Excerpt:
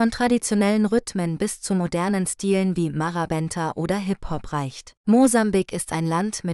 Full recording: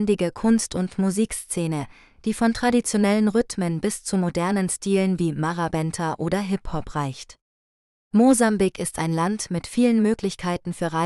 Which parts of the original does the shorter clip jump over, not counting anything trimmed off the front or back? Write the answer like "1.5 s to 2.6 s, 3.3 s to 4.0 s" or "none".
7.4 s to 8.0 s